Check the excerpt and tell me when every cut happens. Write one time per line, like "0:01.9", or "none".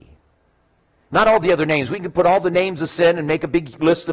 0:01.1